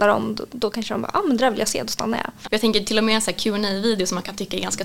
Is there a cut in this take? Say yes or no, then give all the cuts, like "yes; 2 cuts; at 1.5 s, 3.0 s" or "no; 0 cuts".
yes; 1 cut; at 2.5 s